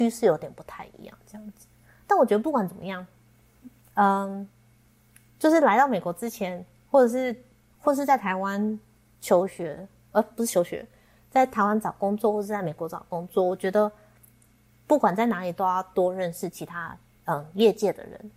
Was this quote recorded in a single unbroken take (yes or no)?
yes